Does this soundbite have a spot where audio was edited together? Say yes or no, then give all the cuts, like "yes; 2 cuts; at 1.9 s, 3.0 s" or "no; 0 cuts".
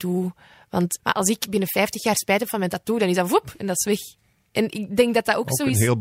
yes; 1 cut; at 1.0 s